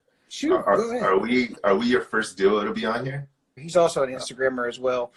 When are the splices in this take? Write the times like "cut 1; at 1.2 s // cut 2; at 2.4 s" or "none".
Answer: cut 1; at 3.6 s